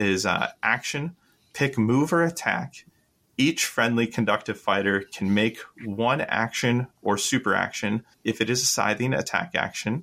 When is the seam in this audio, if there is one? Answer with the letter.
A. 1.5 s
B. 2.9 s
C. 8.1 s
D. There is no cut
C